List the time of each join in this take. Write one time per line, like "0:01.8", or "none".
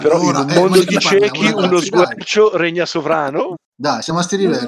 0:03.5